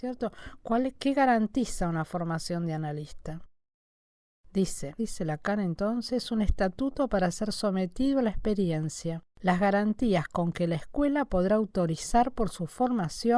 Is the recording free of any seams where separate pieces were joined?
no; 2 cuts; at 5.0 s, 9.3 s

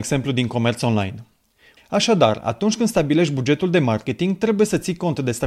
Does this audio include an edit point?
yes; 1 cut; at 1.8 s

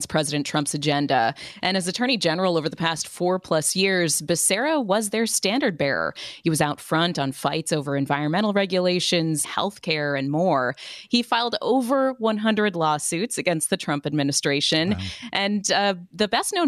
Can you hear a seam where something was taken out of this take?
yes; 1 cut; at 9.4 s

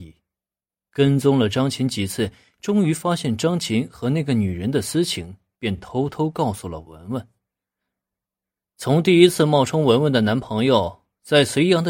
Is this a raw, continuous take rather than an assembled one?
yes; 0 cuts

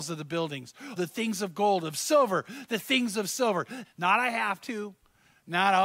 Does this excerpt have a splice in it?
yes; 2 cuts; at 1.0 s, 3.8 s

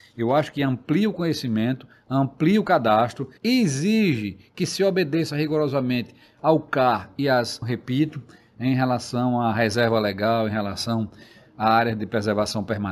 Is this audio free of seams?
no; 2 cuts; at 3.4 s, 7.6 s

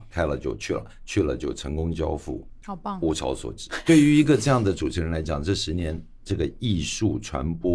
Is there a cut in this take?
yes; 1 cut; at 3.7 s

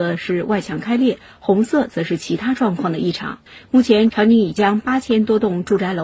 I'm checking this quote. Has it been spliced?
yes; 1 cut; at 3.6 s

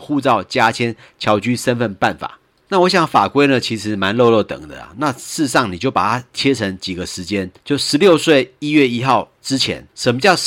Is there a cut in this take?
no; 0 cuts

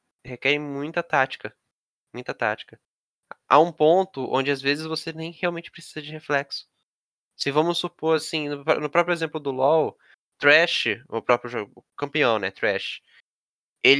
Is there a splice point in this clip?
no; 0 cuts

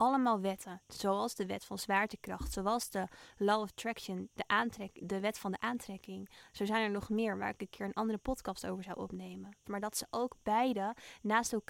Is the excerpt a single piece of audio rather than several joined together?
no; 2 cuts; at 5.0 s, 9.6 s

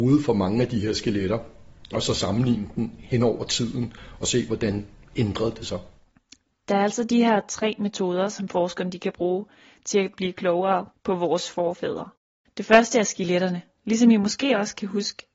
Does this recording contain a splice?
no; 0 cuts

